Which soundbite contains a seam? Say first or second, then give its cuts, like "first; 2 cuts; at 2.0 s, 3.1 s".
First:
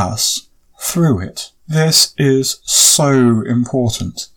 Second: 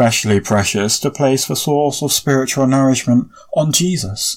first; 1 cut; at 1.6 s